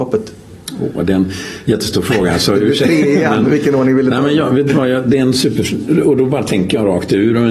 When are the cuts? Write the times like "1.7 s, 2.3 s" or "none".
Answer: none